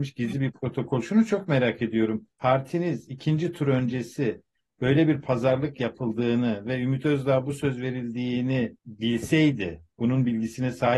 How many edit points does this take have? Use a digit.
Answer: 2